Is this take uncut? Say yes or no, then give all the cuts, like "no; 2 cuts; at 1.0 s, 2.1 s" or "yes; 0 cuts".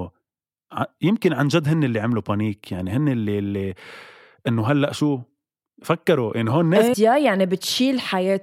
no; 1 cut; at 6.9 s